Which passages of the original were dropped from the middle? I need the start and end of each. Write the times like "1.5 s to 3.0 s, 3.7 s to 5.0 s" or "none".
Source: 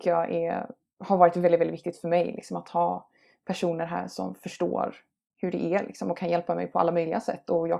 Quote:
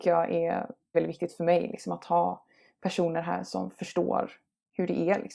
0.9 s to 1.6 s